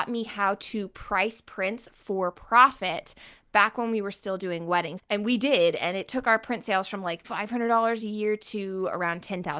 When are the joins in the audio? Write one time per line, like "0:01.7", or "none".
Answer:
0:05.0
0:07.2